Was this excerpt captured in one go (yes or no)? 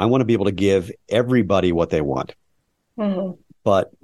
yes